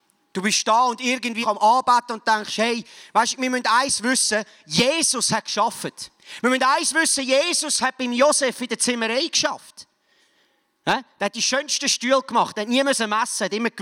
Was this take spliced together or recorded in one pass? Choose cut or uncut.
cut